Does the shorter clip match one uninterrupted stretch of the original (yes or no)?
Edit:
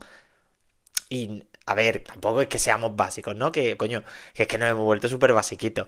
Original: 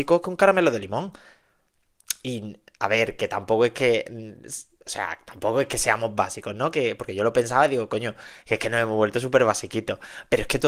no